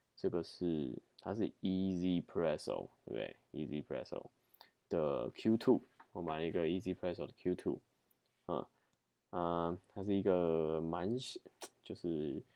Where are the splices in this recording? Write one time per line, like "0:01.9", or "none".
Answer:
0:01.1